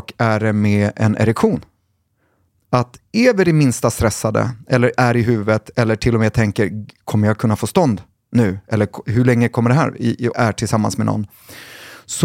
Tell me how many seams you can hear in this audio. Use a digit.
1